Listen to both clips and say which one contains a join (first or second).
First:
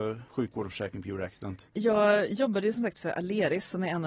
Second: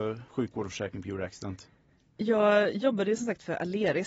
first